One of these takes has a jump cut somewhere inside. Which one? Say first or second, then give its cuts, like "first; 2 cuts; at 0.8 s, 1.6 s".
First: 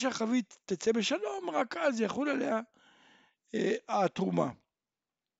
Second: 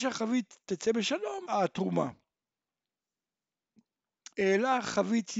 second; 2 cuts; at 1.4 s, 4.3 s